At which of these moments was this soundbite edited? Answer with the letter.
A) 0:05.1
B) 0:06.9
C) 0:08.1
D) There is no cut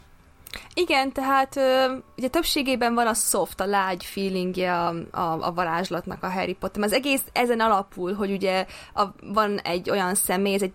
D